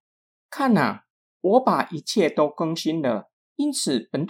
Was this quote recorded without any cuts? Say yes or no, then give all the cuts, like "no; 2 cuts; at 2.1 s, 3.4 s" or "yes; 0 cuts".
no; 1 cut; at 3.4 s